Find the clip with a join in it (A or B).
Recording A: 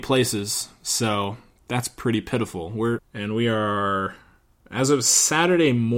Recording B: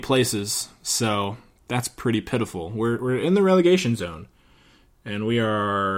A